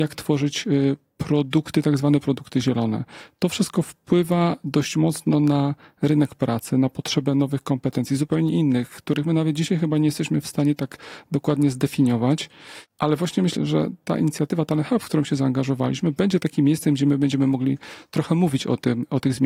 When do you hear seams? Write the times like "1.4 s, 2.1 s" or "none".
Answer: 13.6 s